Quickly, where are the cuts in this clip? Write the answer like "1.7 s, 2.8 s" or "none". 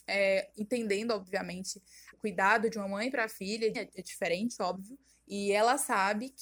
2.1 s, 3.7 s, 5.1 s